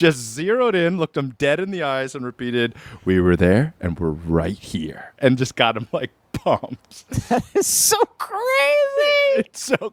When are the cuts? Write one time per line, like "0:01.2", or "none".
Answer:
none